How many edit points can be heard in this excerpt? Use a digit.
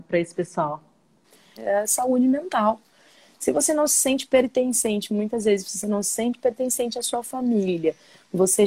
1